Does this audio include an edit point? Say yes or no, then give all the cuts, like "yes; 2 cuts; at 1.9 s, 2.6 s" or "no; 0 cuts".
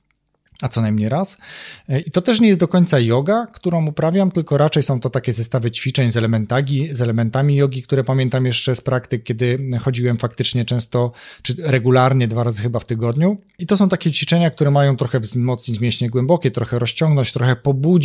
yes; 2 cuts; at 2.0 s, 13.6 s